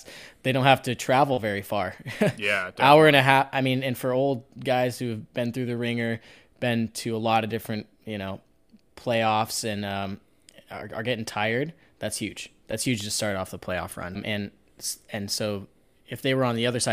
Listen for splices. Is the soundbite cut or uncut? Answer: cut